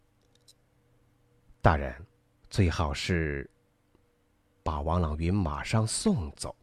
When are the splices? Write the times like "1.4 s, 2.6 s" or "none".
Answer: 2.4 s